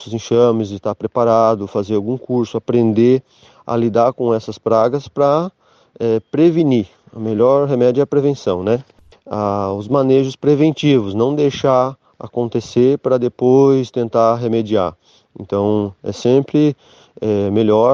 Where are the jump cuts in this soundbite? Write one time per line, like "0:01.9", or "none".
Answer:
0:09.1